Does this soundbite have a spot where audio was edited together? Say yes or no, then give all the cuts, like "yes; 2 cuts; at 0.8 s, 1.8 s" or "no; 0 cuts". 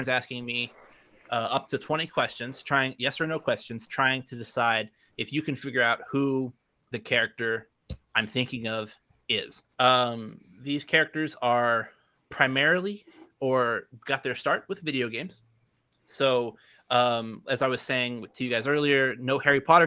yes; 1 cut; at 9.7 s